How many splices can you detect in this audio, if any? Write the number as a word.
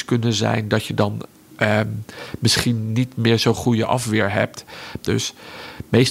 one